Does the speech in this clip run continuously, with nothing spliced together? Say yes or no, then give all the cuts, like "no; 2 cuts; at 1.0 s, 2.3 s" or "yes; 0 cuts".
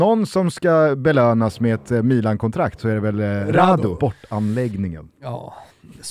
no; 1 cut; at 4.0 s